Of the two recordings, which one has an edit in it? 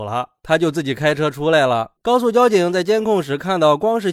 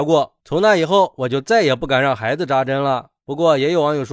first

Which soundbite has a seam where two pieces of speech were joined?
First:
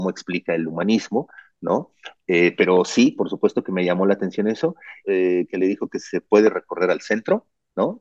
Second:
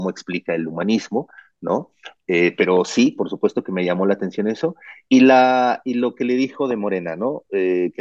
first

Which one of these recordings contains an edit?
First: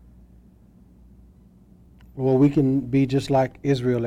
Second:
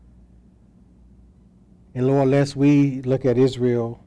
second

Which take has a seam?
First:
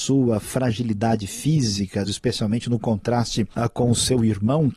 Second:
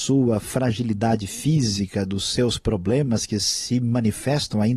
first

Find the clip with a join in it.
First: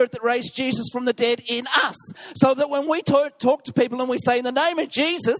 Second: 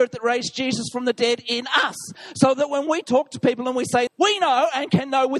second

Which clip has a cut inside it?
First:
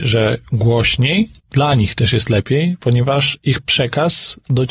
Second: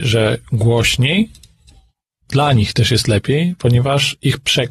first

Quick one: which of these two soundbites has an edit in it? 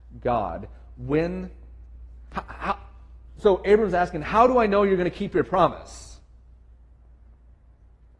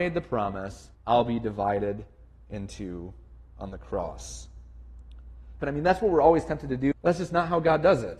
second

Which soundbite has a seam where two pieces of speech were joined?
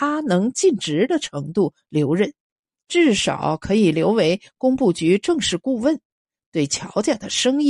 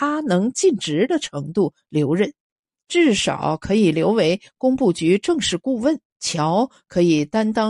second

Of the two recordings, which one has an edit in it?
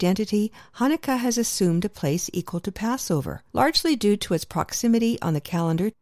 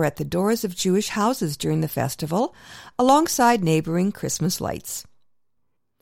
first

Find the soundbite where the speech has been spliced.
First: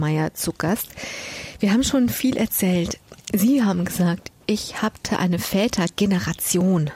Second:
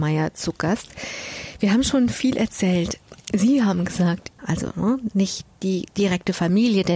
second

